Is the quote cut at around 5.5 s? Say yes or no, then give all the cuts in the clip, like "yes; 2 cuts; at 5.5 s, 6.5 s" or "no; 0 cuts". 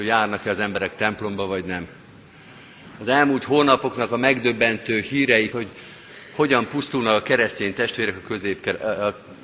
yes; 1 cut; at 5.5 s